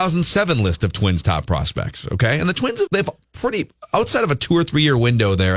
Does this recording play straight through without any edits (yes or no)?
no